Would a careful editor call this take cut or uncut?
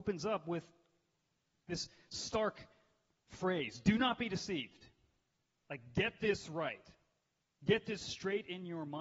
uncut